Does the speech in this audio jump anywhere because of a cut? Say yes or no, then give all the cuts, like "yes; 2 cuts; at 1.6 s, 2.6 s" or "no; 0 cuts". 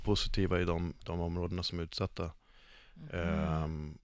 no; 0 cuts